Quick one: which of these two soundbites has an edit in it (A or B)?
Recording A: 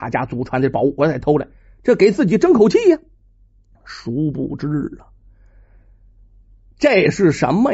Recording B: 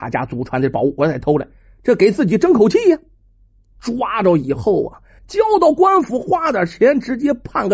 B